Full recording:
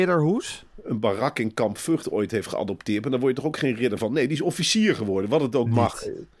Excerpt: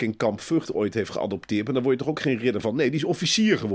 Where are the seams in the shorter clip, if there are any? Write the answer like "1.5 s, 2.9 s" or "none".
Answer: none